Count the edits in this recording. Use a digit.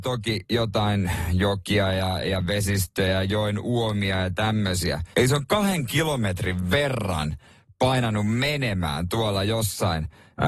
1